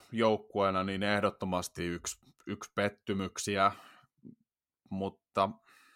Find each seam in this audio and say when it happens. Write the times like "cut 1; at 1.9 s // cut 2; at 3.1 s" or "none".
none